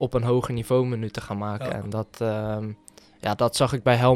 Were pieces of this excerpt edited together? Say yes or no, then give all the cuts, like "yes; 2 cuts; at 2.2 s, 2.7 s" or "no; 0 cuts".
no; 0 cuts